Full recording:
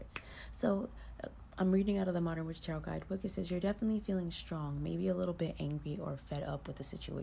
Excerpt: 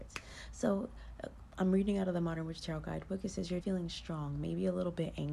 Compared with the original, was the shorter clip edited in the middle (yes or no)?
yes